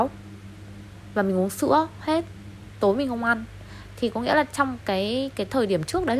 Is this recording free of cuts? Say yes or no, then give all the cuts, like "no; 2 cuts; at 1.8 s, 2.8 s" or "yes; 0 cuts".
yes; 0 cuts